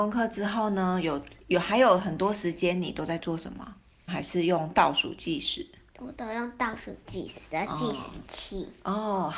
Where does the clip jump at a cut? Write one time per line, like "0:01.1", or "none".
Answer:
0:04.1